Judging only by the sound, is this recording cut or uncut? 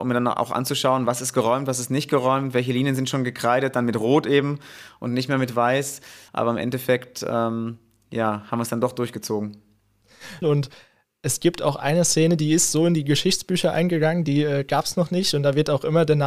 cut